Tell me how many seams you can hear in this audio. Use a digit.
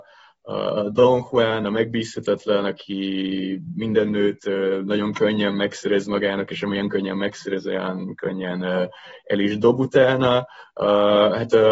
0